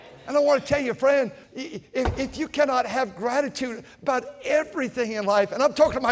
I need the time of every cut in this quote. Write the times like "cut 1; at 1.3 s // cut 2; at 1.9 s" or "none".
cut 1; at 1.4 s